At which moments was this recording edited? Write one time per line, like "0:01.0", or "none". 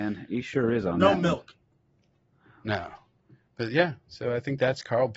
none